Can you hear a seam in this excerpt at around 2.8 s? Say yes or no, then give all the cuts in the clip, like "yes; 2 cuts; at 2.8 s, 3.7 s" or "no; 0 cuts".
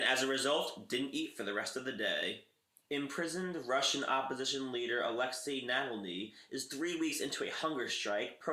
yes; 1 cut; at 2.8 s